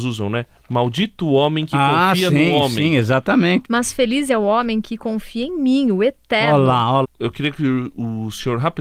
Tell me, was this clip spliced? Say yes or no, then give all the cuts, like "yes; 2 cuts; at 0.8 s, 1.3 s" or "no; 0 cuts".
yes; 2 cuts; at 3.6 s, 7.0 s